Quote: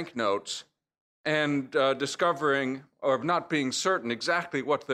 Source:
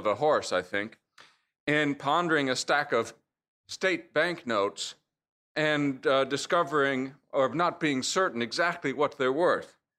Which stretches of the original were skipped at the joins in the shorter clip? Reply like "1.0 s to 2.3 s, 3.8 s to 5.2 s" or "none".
none